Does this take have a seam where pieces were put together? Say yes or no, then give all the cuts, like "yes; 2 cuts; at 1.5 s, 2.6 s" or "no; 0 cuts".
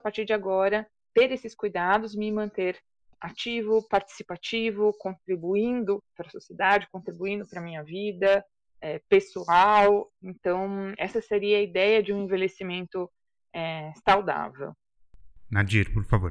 no; 0 cuts